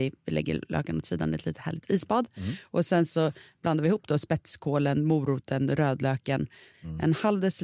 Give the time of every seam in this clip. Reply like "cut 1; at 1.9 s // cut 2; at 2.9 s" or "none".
cut 1; at 6.7 s